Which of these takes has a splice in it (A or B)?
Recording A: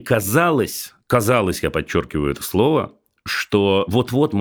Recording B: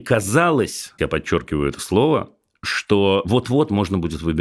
B